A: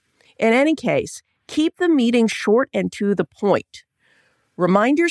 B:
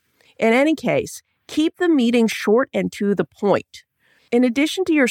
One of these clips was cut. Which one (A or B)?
B